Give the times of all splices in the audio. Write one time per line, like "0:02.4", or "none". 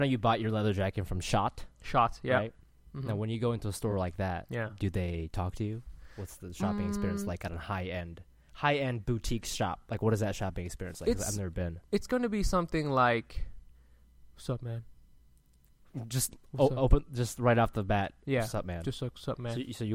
none